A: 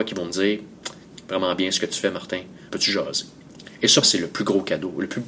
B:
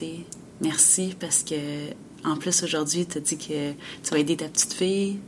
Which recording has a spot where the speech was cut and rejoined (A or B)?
A